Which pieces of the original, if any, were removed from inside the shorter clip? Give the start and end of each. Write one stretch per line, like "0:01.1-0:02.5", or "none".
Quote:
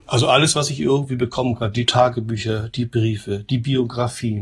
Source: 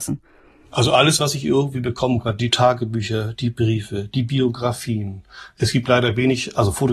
none